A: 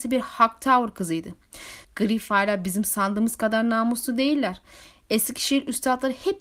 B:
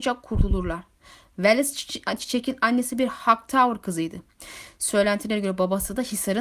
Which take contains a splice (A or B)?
A